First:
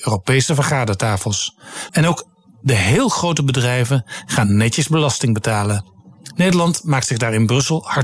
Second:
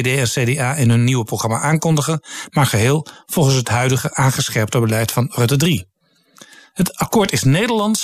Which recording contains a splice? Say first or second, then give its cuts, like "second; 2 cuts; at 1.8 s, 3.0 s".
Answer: first; 1 cut; at 1.9 s